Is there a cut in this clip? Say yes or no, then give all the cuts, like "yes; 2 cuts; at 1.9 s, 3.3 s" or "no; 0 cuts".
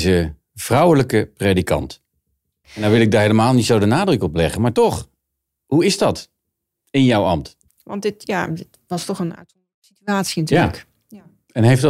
yes; 2 cuts; at 2.6 s, 7.7 s